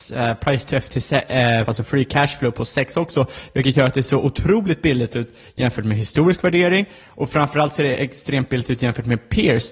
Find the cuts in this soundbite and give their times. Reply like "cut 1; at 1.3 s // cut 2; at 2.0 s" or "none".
cut 1; at 1.7 s